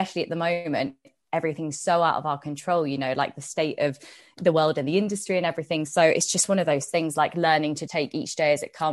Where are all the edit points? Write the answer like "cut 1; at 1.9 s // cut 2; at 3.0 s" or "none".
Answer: cut 1; at 7.9 s